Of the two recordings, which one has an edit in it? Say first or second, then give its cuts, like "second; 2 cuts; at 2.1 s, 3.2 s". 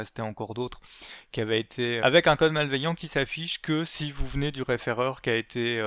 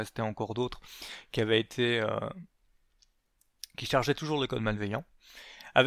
first; 1 cut; at 2.0 s